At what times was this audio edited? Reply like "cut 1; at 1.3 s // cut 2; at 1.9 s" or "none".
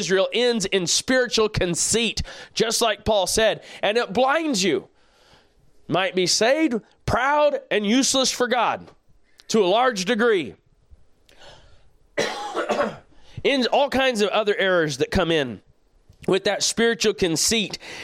none